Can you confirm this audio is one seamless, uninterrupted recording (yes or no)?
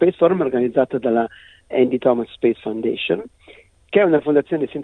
no